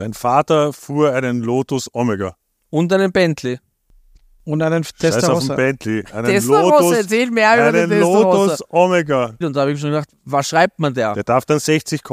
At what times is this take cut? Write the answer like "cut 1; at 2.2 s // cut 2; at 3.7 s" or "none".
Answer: cut 1; at 9.4 s